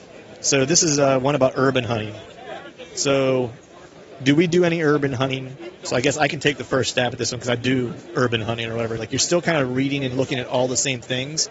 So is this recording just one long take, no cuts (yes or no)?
no